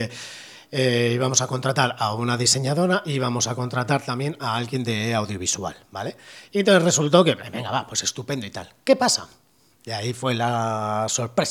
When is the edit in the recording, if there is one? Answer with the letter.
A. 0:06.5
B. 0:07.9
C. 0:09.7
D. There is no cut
D